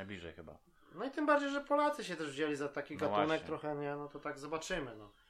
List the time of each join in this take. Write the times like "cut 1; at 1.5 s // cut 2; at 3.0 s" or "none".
none